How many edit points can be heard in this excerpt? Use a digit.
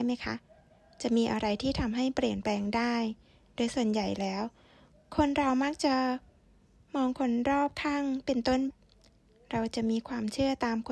1